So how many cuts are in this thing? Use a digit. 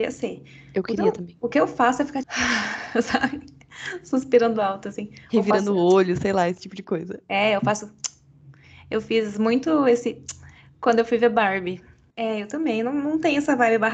2